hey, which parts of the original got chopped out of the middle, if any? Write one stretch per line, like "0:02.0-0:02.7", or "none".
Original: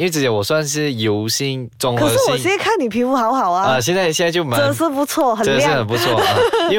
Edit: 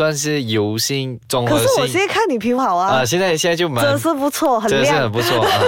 0:03.1-0:03.3